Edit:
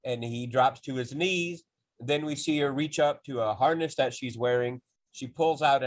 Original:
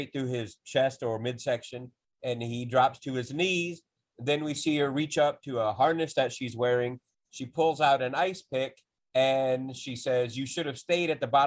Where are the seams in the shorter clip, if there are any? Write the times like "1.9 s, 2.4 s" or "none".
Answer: none